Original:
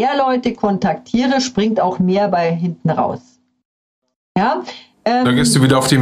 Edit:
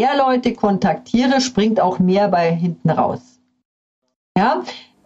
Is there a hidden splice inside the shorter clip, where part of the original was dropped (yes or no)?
no